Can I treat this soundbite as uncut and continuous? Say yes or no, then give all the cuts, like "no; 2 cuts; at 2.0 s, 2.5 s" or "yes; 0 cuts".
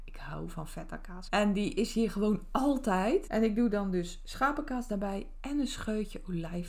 no; 2 cuts; at 1.3 s, 3.3 s